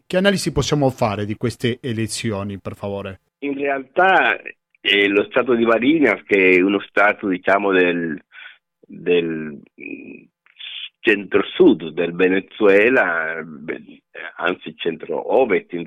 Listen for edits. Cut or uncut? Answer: cut